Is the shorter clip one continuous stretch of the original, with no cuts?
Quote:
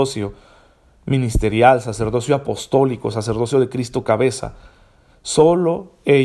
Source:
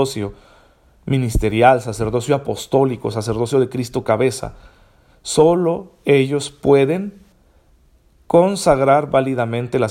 yes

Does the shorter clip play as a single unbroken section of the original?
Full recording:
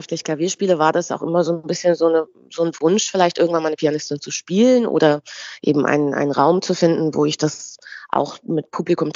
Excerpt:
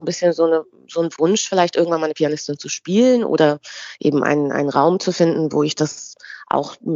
yes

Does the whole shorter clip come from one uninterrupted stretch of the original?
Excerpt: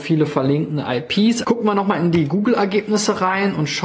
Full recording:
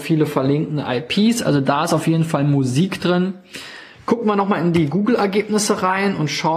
no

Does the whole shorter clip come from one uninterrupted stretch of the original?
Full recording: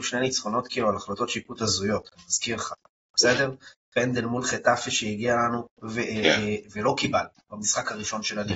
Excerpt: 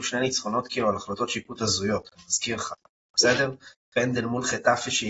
yes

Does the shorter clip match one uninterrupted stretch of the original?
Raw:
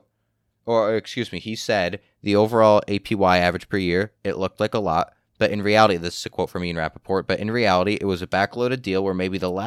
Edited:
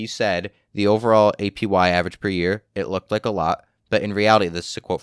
yes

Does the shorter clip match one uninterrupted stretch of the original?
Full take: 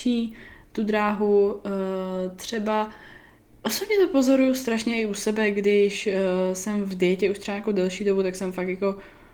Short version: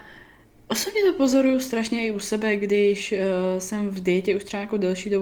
yes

